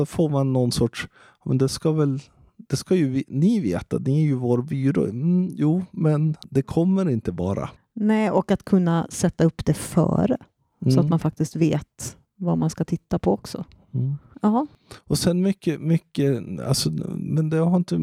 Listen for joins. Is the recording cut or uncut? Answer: uncut